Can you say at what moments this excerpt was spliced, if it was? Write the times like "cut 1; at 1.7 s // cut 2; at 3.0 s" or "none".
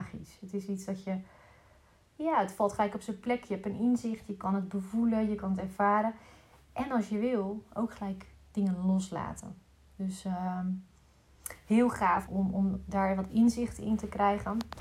cut 1; at 12.3 s